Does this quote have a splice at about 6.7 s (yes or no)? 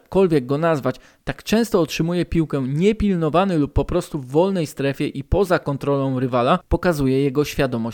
no